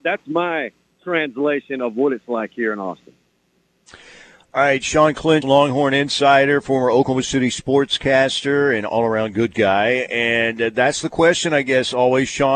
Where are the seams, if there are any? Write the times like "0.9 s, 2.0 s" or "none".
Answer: 5.4 s